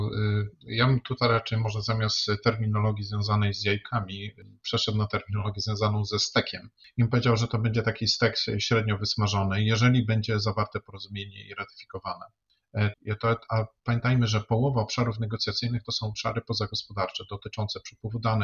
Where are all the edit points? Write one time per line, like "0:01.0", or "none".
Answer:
0:12.9